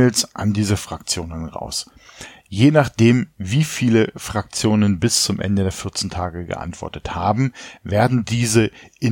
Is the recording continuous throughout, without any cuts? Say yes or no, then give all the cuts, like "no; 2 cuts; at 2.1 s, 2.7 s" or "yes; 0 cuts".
yes; 0 cuts